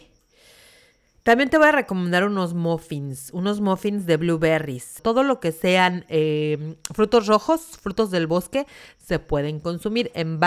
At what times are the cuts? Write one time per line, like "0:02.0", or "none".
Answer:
0:05.0